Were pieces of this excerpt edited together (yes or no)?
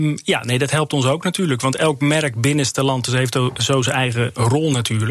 no